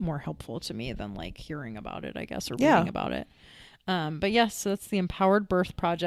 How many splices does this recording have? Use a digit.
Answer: 0